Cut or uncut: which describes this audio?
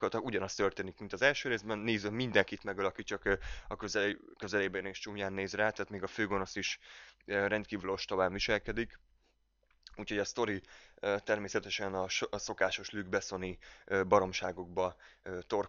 uncut